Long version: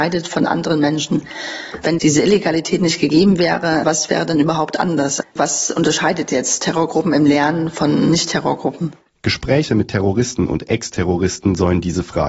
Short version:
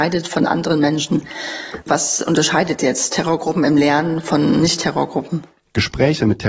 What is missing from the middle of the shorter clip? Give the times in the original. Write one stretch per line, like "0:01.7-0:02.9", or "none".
0:01.8-0:05.3